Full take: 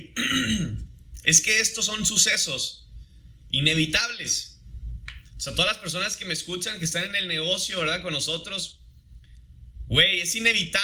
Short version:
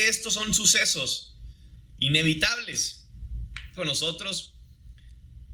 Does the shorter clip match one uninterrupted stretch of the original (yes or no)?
no